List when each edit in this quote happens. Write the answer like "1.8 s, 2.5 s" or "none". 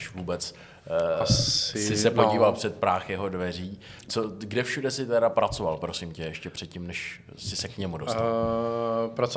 none